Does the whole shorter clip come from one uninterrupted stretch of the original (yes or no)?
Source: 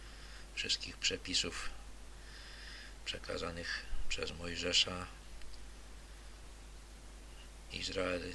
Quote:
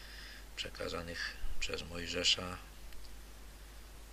yes